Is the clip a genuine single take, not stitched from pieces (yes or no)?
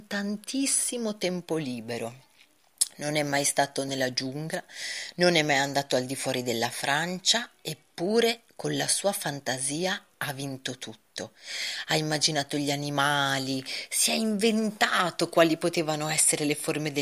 no